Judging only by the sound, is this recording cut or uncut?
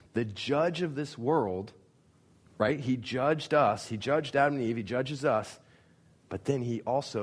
uncut